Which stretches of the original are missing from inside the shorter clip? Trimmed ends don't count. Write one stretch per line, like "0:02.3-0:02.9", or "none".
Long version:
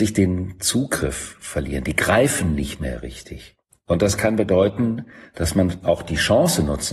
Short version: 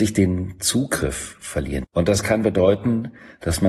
0:01.8-0:03.8